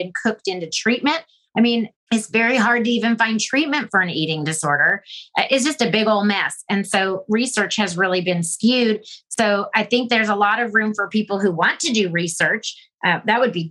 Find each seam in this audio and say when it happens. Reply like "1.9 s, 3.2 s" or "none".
1.9 s